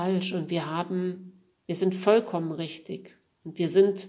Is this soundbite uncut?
yes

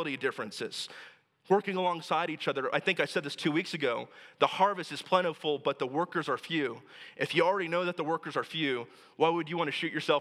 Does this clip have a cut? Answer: no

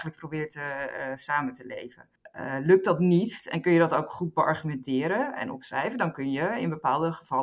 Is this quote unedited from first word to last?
yes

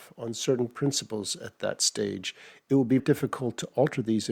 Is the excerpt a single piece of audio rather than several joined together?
no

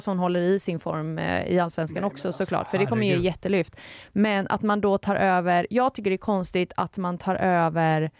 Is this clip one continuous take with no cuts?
yes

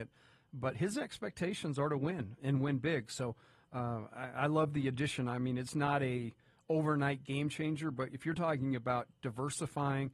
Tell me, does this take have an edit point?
no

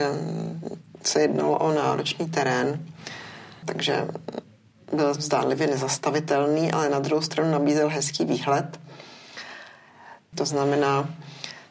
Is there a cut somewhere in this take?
yes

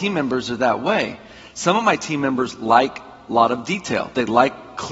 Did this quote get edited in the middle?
no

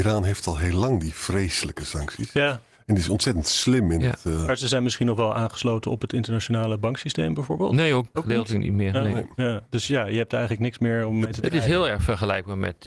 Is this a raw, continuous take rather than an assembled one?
no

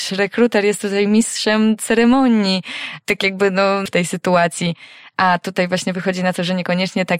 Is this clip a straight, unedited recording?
no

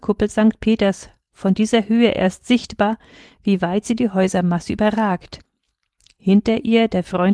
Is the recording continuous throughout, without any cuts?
yes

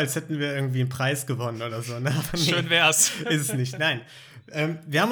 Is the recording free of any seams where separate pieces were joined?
yes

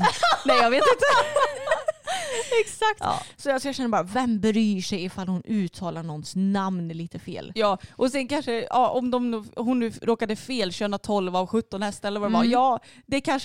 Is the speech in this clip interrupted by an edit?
no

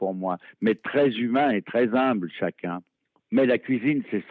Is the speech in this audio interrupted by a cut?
no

